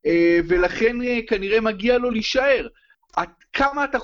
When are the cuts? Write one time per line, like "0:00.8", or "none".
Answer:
0:02.9